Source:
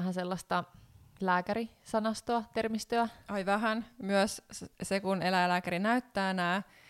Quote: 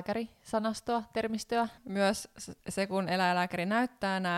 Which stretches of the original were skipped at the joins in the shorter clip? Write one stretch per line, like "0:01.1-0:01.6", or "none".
0:03.2-0:03.9